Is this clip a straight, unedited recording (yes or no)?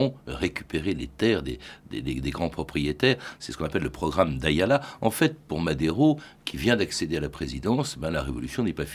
yes